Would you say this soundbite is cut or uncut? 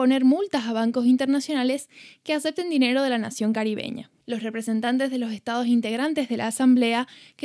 cut